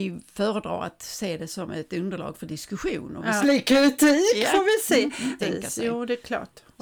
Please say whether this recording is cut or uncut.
cut